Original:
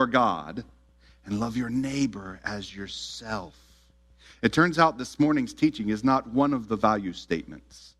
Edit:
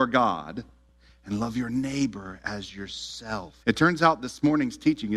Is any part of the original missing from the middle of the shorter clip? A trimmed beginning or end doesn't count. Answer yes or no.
yes